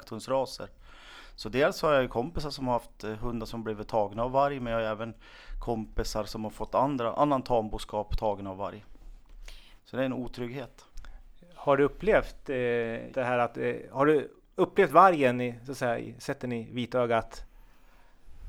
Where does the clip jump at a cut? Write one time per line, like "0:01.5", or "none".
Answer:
0:09.8
0:13.1